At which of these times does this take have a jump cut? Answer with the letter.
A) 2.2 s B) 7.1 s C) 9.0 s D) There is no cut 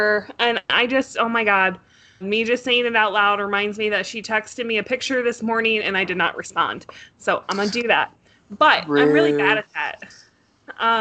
A